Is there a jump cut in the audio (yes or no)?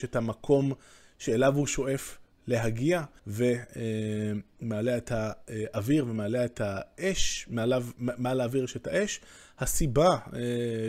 yes